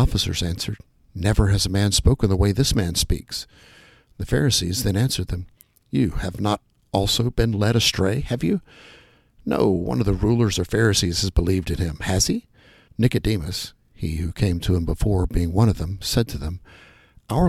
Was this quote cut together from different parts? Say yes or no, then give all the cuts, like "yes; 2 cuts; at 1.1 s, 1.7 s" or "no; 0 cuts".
yes; 1 cut; at 12.9 s